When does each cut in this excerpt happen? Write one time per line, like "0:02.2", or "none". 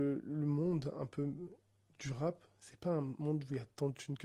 none